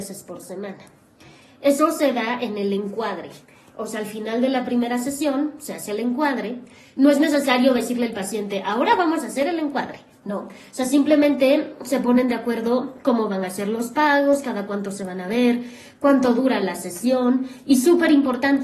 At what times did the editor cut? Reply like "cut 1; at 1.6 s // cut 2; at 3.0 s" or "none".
none